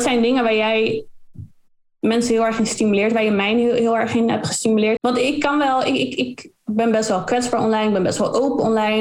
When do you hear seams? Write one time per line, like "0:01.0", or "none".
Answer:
0:05.0